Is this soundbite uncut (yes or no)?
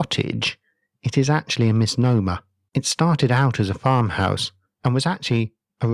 no